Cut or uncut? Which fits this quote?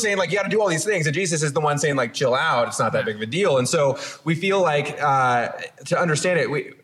uncut